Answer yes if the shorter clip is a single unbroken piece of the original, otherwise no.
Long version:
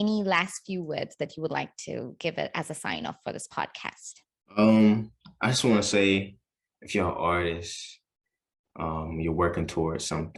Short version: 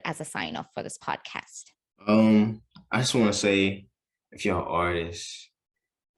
yes